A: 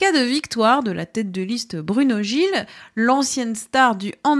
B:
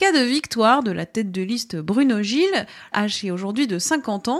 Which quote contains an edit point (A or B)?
B